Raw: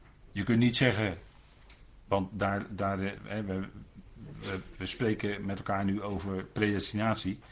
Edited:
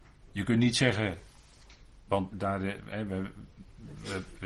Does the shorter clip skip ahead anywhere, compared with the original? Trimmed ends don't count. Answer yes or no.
yes